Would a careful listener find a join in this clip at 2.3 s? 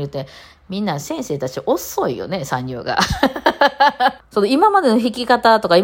no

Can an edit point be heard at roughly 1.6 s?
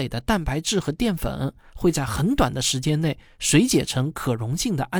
no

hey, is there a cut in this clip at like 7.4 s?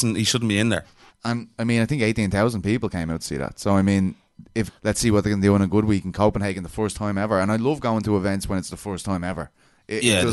no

